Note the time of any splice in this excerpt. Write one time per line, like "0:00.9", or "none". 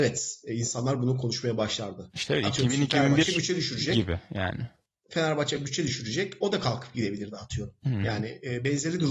none